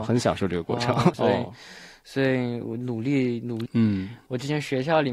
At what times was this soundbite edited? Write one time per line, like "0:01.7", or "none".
0:01.1
0:03.7